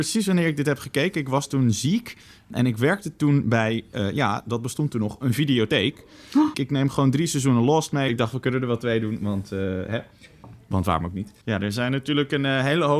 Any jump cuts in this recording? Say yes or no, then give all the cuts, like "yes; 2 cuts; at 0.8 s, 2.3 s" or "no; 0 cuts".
yes; 3 cuts; at 6.5 s, 8.1 s, 11.4 s